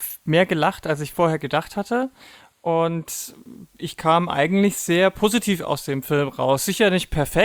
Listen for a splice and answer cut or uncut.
uncut